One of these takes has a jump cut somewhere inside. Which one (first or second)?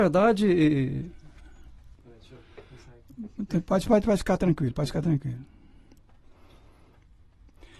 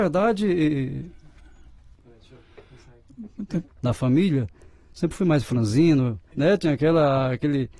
second